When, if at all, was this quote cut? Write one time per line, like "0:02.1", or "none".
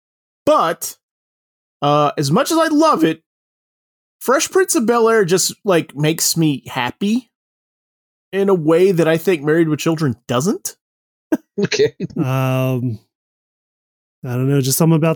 0:11.5